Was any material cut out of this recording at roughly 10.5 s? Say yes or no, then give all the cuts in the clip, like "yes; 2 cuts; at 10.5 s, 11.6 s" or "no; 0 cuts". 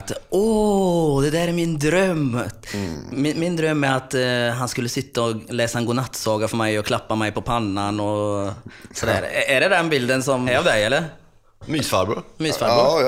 yes; 1 cut; at 10.5 s